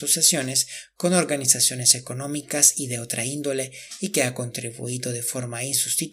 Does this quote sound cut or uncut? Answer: uncut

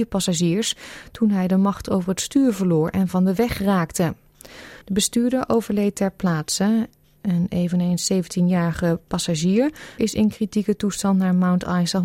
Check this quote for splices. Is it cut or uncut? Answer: cut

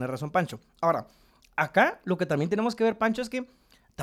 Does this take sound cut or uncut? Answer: uncut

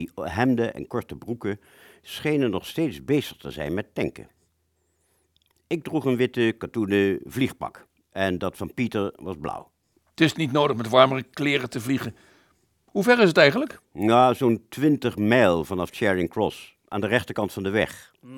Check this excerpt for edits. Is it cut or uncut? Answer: uncut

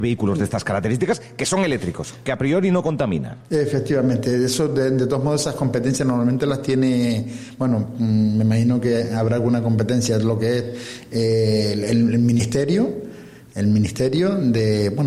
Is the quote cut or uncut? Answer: uncut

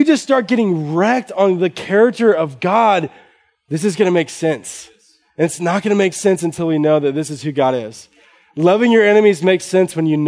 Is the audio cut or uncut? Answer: uncut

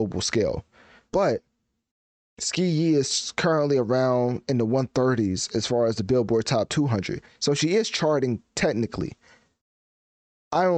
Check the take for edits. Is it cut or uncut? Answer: cut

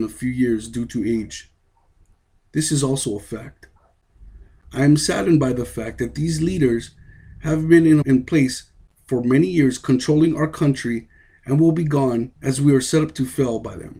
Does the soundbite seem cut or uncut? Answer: cut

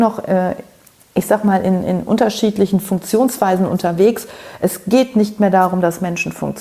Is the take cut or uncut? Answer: uncut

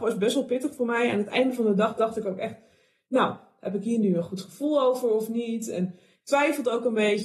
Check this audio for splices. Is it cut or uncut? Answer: uncut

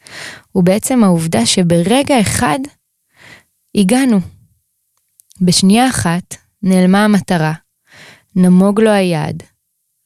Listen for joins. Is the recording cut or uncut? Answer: uncut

